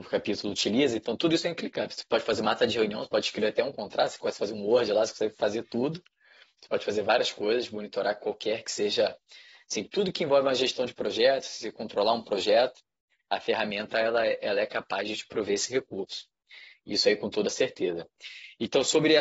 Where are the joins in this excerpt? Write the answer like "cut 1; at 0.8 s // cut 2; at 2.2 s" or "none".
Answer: none